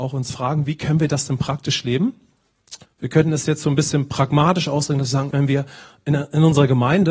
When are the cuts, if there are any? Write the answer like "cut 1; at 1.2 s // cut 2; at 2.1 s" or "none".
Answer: cut 1; at 2.8 s // cut 2; at 5.3 s